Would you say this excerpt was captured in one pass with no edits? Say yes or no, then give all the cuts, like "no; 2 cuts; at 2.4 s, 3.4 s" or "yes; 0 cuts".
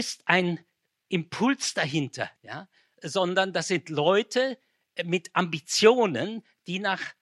no; 1 cut; at 2.4 s